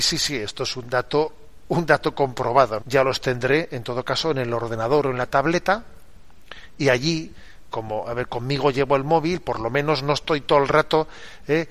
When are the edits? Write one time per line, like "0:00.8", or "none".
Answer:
0:02.8
0:07.7